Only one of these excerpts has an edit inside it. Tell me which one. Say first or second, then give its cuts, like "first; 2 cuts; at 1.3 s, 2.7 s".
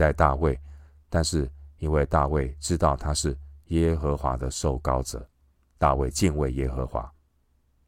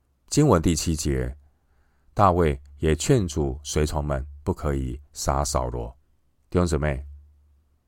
second; 1 cut; at 6.4 s